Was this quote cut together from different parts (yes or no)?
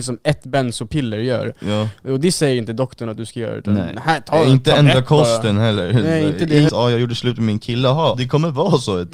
yes